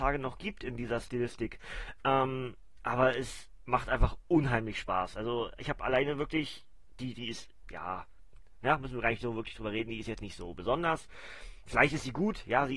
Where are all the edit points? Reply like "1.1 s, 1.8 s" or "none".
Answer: 7.1 s